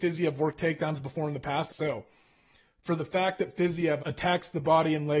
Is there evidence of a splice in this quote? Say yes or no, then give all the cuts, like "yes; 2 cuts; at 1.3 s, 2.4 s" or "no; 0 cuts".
yes; 2 cuts; at 1.7 s, 4.0 s